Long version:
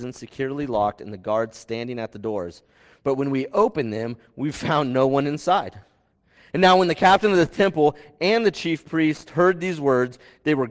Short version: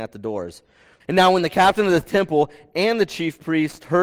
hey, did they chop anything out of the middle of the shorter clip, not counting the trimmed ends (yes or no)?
yes